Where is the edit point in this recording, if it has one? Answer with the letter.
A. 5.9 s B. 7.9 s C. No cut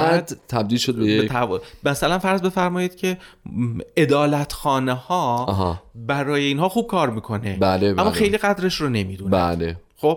C